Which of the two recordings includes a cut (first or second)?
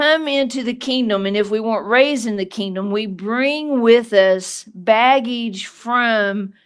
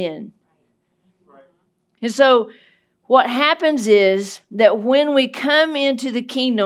second